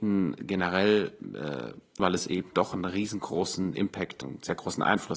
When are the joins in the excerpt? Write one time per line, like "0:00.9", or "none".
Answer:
0:02.0
0:04.2